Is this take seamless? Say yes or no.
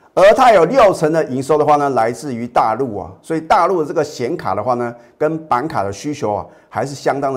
yes